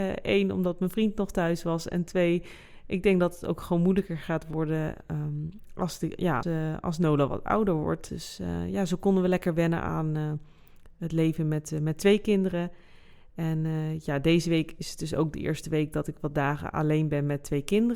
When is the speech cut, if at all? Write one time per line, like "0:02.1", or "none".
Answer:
0:06.4
0:08.1